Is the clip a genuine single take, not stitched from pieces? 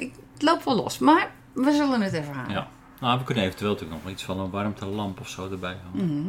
yes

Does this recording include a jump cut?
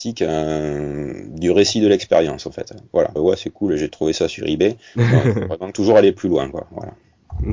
yes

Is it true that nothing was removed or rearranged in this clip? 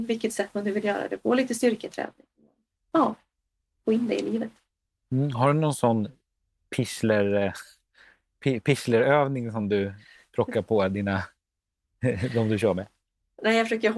yes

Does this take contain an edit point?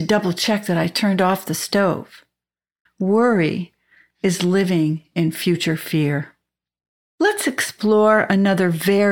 yes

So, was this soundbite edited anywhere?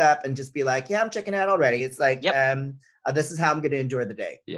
no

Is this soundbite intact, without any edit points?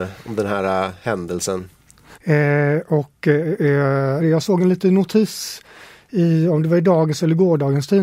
no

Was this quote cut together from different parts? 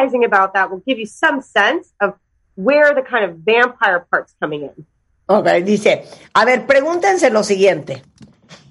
no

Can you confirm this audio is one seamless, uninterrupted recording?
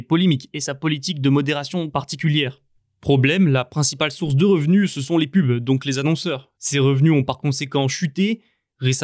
yes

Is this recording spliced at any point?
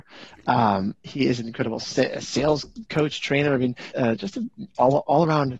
yes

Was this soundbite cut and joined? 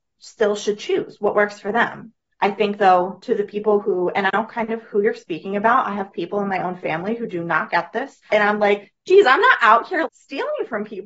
yes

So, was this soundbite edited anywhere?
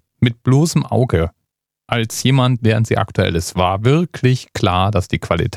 yes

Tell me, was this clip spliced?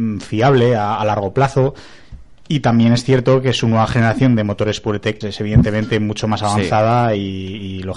yes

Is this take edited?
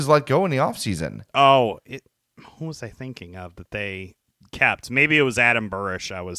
no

